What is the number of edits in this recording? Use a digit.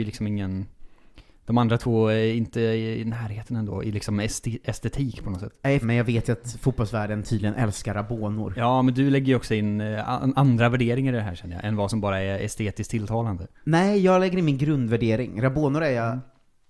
1